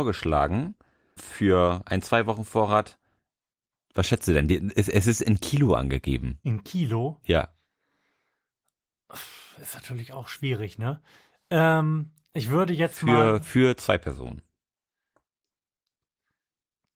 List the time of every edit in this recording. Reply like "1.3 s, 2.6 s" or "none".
1.2 s